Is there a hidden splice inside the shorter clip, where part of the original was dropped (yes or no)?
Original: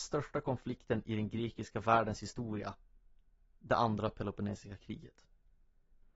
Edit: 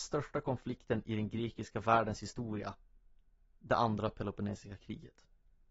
no